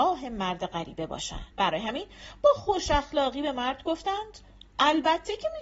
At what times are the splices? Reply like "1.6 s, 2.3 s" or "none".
1.5 s